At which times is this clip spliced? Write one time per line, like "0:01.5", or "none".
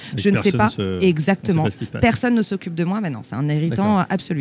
none